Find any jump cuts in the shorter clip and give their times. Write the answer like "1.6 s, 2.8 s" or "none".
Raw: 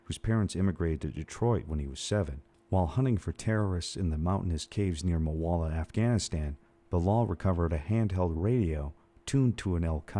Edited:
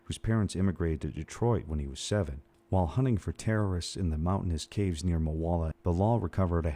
5.7 s